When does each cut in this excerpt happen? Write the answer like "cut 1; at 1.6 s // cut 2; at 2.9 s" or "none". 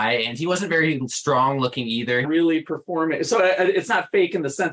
cut 1; at 2.2 s